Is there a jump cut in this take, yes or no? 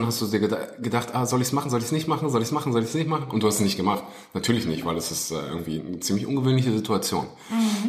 no